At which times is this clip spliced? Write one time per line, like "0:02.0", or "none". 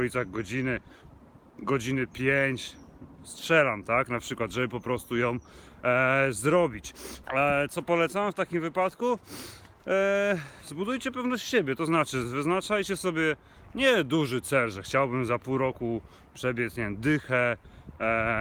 0:07.2